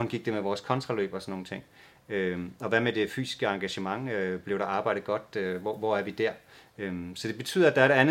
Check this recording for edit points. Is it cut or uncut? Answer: uncut